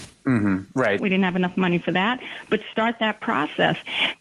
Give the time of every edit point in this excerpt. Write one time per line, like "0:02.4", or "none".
0:01.0